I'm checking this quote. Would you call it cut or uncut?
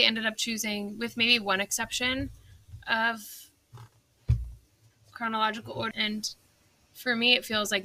cut